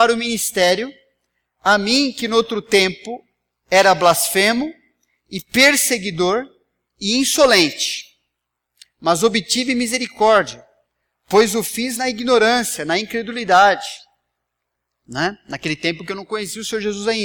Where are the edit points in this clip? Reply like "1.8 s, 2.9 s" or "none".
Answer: none